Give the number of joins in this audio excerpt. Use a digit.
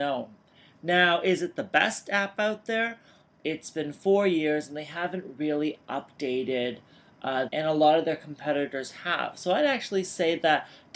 2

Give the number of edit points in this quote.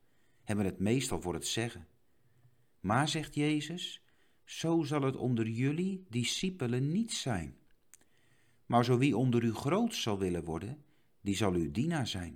0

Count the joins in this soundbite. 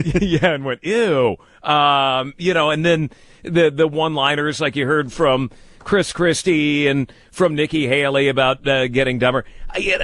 0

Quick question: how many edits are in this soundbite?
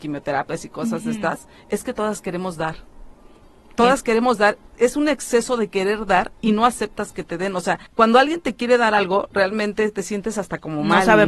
1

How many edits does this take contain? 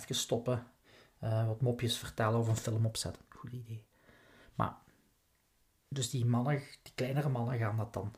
1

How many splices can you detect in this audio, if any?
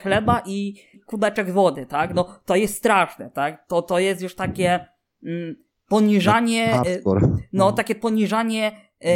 1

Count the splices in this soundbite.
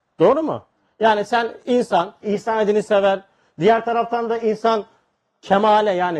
1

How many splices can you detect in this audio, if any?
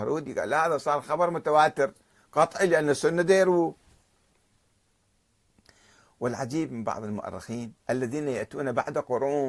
1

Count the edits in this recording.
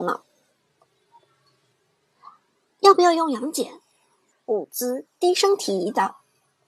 1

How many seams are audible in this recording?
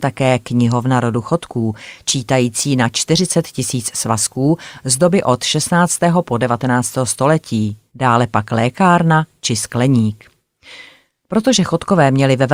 0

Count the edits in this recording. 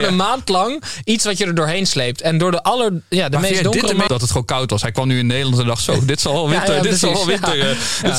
1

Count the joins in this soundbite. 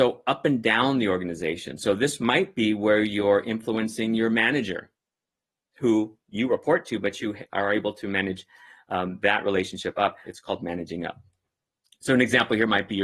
1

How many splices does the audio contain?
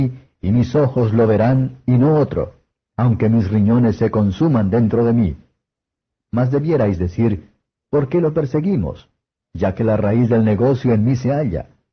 0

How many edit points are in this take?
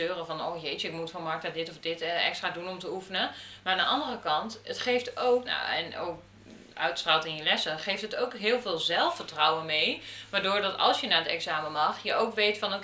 1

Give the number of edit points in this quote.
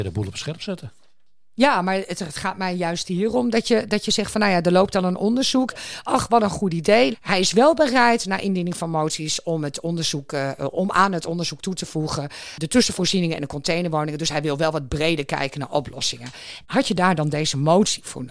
2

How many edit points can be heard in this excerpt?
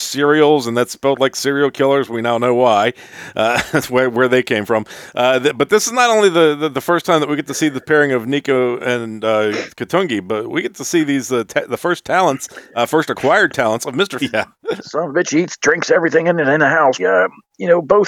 2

